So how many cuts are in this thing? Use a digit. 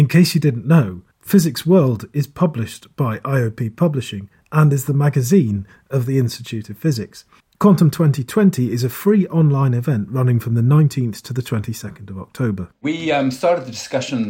1